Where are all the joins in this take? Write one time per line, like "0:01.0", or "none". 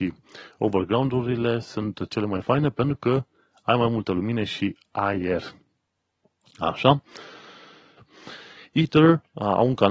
0:08.0